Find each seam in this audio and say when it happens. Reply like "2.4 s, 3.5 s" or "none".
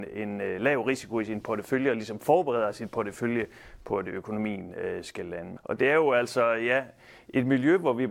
5.6 s